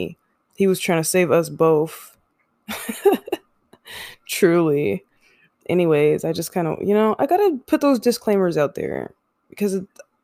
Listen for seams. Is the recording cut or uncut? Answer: uncut